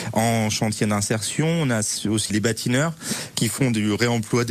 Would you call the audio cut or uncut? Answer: cut